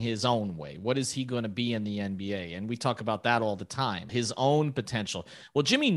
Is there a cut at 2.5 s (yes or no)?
no